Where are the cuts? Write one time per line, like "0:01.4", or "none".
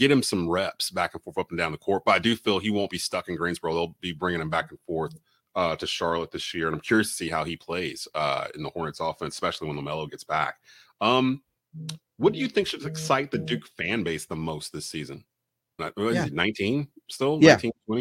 0:15.8